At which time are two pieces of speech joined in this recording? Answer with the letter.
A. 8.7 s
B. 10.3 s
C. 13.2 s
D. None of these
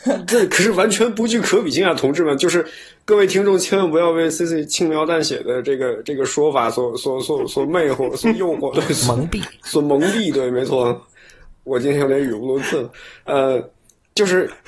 A